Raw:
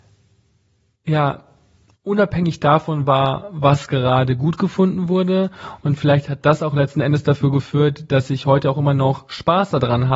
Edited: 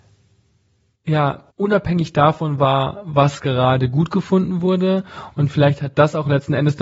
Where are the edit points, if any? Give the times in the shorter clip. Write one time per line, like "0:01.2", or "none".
0:01.5